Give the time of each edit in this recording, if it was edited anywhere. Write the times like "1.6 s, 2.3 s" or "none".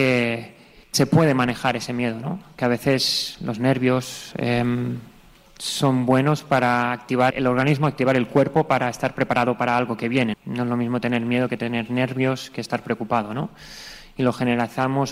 7.3 s, 10.3 s